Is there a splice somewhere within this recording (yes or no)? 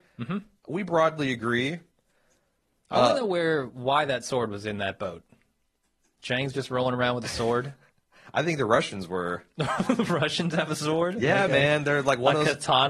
no